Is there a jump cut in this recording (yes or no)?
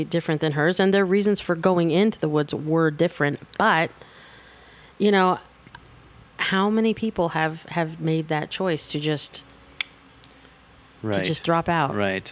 no